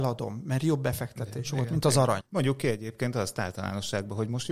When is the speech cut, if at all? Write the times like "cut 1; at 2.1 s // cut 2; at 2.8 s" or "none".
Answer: cut 1; at 2.2 s